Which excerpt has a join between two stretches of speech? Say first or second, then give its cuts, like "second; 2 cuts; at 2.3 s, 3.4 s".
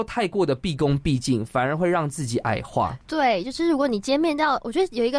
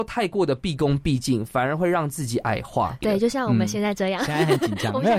second; 1 cut; at 3.0 s